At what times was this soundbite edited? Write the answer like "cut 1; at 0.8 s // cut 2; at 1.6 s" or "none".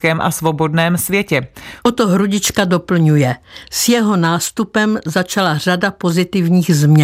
cut 1; at 1.8 s